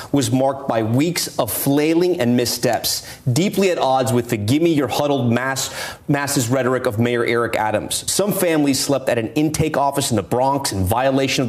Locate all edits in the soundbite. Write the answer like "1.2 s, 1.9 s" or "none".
none